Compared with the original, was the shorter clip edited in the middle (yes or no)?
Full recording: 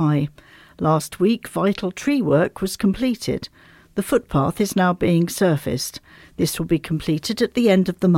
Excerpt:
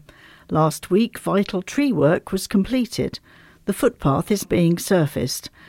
yes